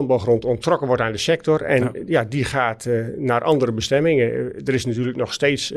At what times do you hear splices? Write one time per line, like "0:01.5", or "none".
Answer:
none